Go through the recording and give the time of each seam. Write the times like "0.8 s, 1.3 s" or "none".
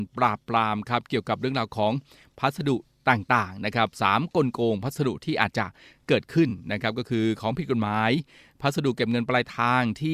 none